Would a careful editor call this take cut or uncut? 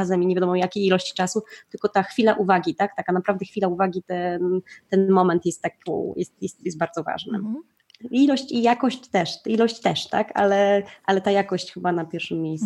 uncut